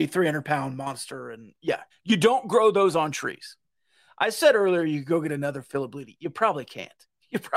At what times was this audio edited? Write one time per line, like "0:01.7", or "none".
0:01.9